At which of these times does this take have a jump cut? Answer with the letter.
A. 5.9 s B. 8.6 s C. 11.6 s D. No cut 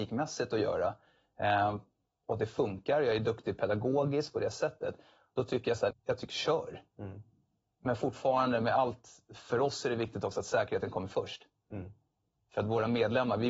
A